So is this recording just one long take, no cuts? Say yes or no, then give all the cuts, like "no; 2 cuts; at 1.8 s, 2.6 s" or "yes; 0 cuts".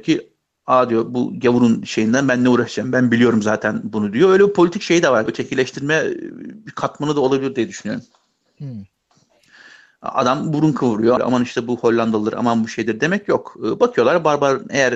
no; 3 cuts; at 5.3 s, 9.5 s, 11.2 s